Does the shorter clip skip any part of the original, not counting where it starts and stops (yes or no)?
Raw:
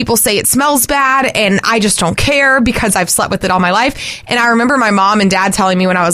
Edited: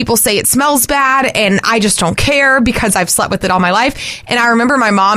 no